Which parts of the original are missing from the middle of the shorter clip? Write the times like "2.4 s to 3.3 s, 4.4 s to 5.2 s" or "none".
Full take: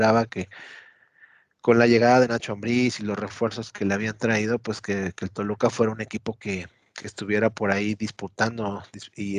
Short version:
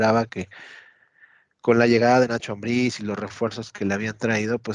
none